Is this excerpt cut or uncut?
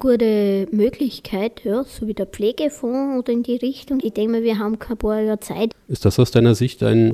cut